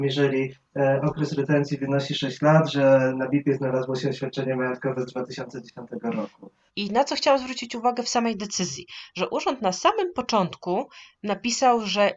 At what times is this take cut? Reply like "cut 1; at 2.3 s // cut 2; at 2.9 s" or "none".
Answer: cut 1; at 6.7 s